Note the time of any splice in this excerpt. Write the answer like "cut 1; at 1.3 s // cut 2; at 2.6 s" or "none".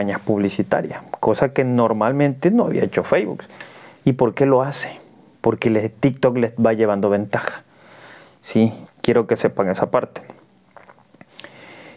cut 1; at 8.8 s